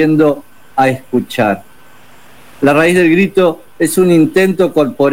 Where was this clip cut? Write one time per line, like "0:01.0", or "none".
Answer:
none